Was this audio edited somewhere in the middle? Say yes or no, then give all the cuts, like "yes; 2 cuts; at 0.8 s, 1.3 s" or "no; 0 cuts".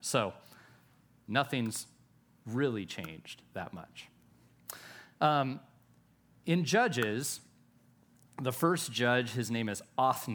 no; 0 cuts